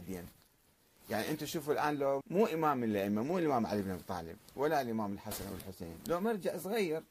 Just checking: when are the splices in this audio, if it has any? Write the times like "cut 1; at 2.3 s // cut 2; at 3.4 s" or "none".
cut 1; at 2.2 s